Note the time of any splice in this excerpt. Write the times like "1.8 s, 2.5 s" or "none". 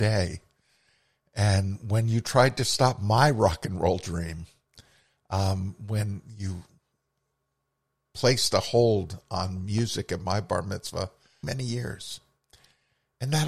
11.4 s